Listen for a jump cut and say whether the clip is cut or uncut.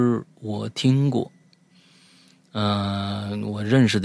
uncut